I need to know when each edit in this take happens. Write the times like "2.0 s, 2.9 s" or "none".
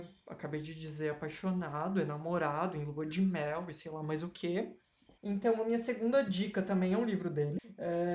none